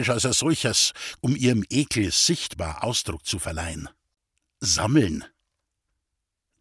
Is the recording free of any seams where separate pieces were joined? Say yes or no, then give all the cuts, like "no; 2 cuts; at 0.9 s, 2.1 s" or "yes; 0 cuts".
no; 1 cut; at 1.2 s